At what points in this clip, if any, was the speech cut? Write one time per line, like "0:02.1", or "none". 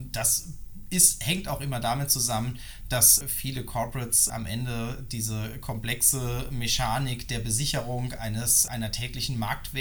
0:03.2
0:04.3
0:08.7